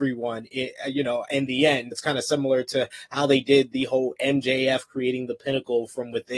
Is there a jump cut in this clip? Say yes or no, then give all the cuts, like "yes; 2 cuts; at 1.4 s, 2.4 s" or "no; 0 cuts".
yes; 1 cut; at 1.9 s